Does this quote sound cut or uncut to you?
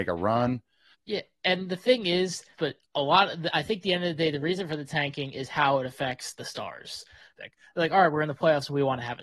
cut